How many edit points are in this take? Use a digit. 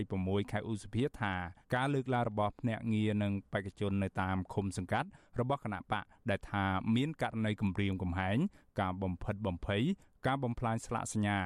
1